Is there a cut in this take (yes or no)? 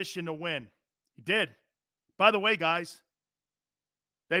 no